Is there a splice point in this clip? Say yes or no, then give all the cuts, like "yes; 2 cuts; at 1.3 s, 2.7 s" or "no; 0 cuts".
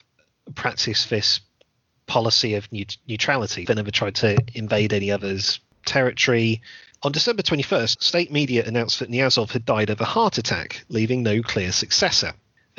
yes; 3 cuts; at 3.7 s, 6.9 s, 8.0 s